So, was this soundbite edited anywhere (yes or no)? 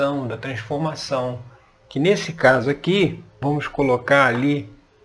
yes